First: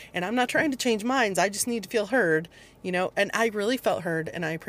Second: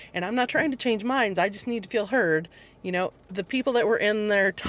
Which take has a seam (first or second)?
second